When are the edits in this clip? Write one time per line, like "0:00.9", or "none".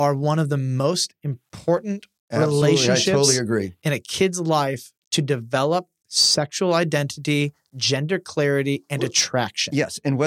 none